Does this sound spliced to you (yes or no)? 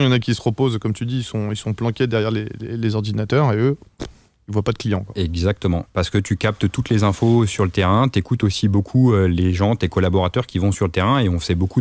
yes